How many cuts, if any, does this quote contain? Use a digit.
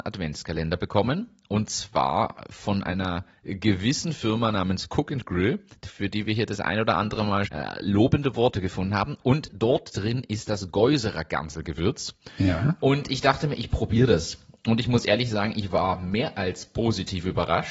1